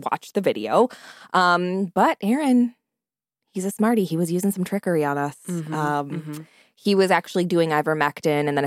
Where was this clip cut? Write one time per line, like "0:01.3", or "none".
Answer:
none